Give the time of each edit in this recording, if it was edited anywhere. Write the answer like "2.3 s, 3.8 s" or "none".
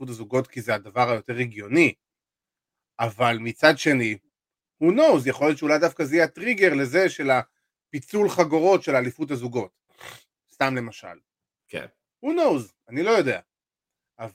12.1 s